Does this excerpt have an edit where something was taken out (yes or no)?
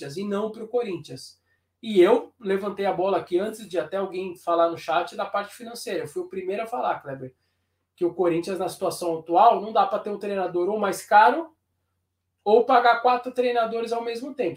no